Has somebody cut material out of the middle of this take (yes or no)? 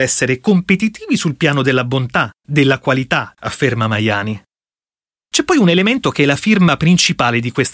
yes